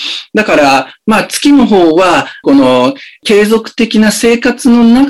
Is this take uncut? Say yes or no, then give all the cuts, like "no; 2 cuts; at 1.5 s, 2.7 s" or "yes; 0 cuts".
no; 1 cut; at 2.4 s